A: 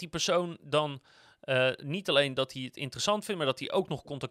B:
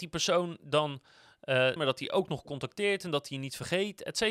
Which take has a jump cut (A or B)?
B